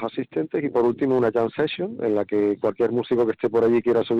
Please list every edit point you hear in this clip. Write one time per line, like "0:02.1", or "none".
none

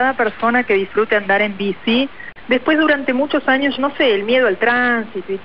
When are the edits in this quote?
0:02.4
0:03.8

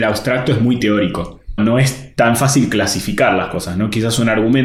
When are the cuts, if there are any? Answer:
0:01.6

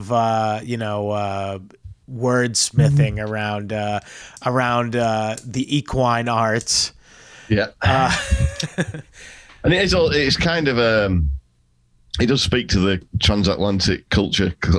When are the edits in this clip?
0:13.1

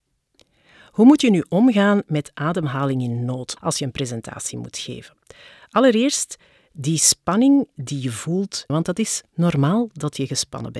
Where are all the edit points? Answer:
0:03.6
0:08.7

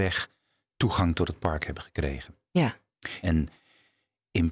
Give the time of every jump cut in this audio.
0:03.2

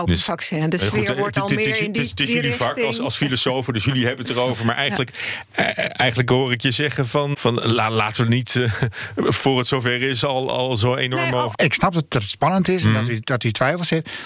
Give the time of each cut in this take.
0:07.3
0:11.5

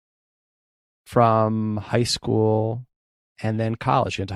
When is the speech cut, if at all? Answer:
none

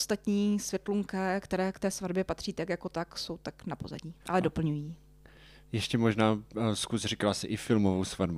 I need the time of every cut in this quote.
0:04.2

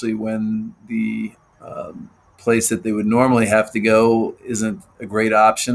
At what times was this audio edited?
none

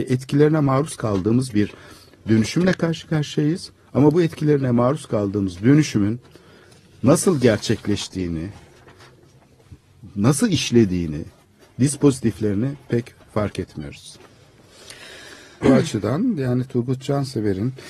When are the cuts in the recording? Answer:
0:15.6

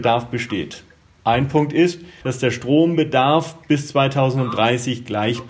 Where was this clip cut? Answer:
0:02.2

